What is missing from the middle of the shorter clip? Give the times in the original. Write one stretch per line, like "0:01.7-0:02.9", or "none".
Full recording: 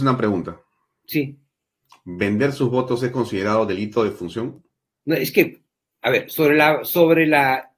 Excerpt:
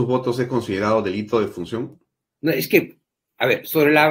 none